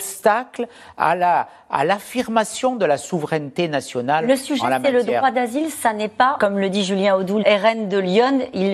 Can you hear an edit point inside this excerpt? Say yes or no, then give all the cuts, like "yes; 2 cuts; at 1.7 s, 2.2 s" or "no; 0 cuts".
yes; 2 cuts; at 6.4 s, 7.4 s